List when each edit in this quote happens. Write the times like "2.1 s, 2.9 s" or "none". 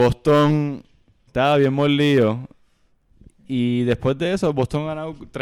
1.3 s